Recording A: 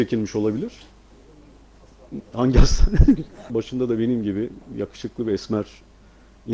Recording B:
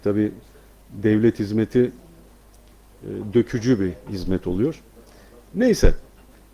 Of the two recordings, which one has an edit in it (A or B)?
A